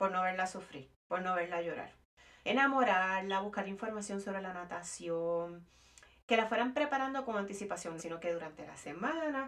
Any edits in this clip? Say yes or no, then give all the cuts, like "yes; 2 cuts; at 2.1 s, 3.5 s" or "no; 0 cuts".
yes; 2 cuts; at 2.4 s, 8.0 s